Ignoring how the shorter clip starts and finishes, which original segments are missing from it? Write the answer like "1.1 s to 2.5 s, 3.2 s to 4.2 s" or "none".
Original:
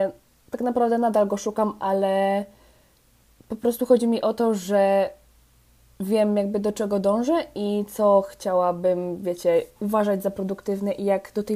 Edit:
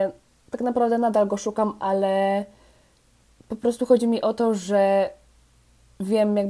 none